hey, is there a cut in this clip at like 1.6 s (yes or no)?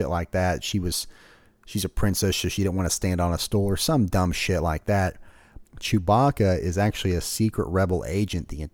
no